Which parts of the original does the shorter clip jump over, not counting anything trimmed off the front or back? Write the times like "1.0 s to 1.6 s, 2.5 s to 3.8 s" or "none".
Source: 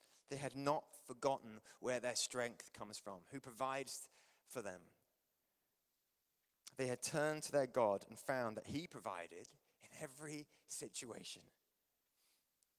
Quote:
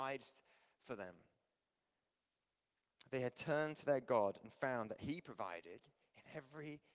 none